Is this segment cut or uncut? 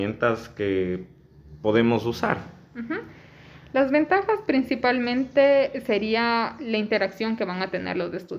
uncut